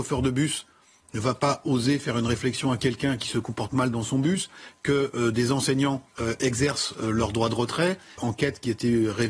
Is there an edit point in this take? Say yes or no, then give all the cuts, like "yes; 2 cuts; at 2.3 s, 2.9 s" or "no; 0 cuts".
yes; 2 cuts; at 6.1 s, 8.2 s